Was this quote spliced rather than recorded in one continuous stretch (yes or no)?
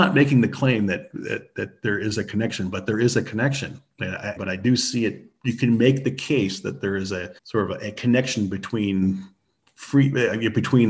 yes